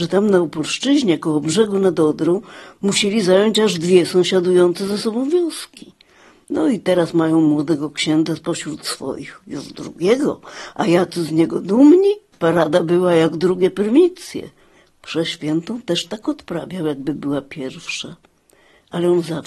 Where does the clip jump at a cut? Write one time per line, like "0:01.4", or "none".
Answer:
0:12.3